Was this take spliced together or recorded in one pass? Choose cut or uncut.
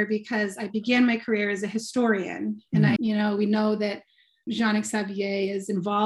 cut